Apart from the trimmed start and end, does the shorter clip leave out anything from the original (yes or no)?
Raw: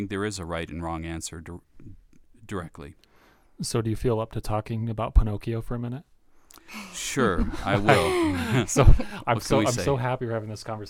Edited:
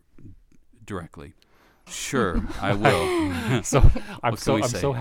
yes